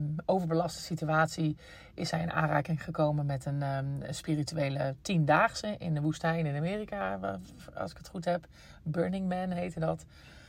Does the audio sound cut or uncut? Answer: uncut